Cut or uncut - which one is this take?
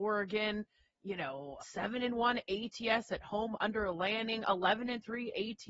cut